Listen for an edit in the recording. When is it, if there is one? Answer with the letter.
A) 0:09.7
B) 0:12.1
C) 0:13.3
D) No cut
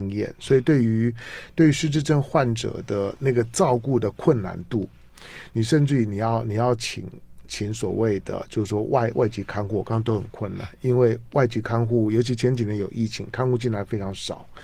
D